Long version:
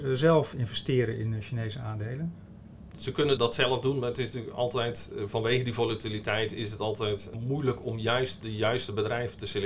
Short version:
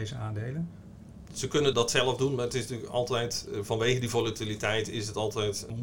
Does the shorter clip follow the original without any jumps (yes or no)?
yes